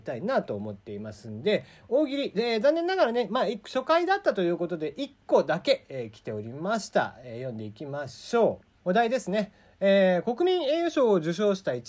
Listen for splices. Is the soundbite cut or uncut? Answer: cut